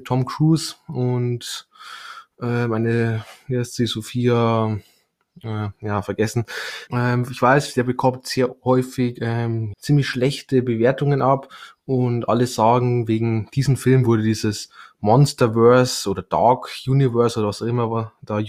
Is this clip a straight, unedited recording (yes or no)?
no